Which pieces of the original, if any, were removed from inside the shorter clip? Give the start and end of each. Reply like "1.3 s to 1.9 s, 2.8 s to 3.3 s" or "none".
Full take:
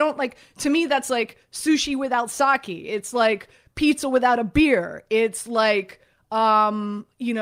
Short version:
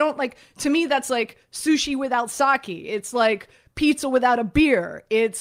none